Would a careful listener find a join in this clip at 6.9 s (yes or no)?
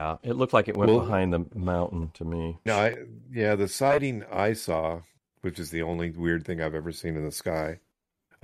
no